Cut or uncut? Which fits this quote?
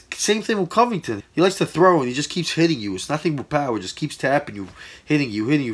cut